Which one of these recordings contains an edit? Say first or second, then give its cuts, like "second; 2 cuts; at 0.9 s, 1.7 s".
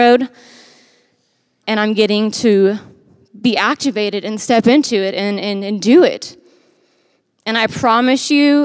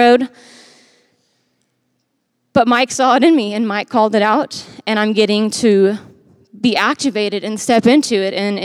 first; 1 cut; at 1.6 s